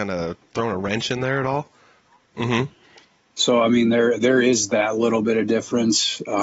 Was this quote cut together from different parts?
yes; 1 cut; at 2.3 s

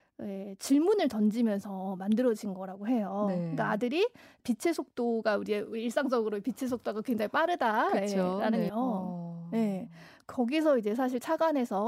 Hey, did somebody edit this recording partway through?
yes; 2 cuts; at 4.4 s, 8.7 s

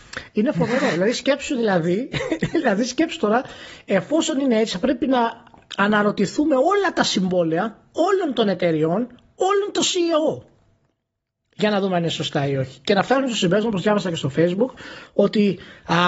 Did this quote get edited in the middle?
no; 0 cuts

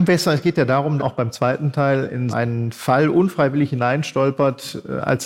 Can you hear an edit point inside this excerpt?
yes; 2 cuts; at 1.0 s, 2.3 s

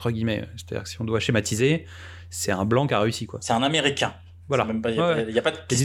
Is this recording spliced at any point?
no; 0 cuts

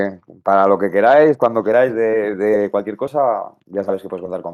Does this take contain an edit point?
no; 0 cuts

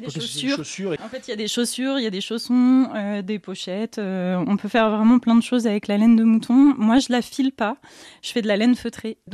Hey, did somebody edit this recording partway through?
yes; 1 cut; at 1.0 s

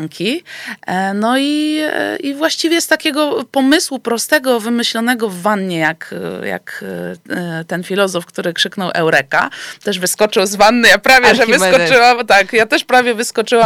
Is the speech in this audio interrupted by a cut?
no; 0 cuts

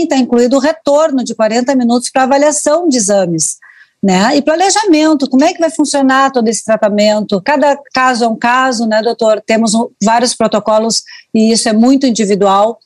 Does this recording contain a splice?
no; 0 cuts

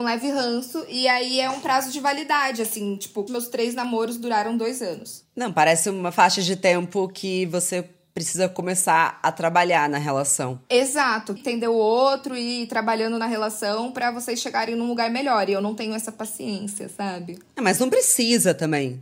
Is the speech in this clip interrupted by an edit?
yes; 2 cuts; at 3.3 s, 11.4 s

